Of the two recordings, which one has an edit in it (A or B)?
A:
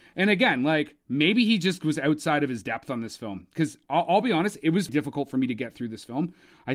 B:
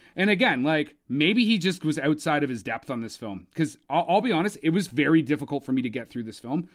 A